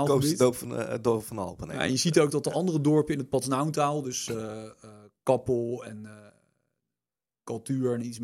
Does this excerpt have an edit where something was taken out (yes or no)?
no